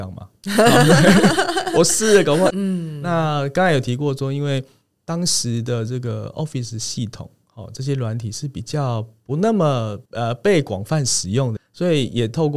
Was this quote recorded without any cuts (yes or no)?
no